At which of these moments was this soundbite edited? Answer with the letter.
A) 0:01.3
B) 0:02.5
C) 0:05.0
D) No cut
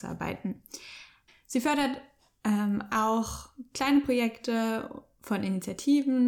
A